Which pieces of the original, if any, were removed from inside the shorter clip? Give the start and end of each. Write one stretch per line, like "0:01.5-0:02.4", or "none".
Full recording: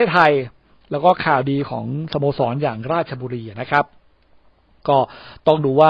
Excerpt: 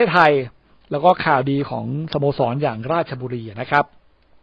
none